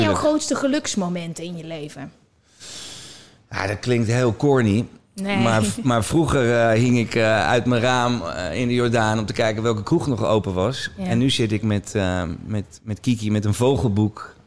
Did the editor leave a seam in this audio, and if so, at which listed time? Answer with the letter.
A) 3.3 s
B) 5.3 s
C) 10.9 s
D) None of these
D